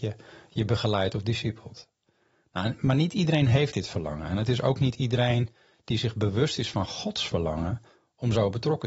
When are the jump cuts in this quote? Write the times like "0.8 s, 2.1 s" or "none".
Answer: none